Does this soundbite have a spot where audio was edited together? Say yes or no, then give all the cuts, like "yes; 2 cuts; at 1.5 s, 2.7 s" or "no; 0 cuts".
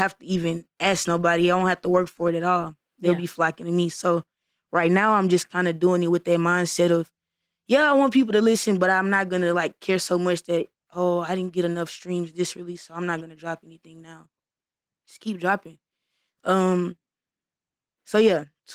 no; 0 cuts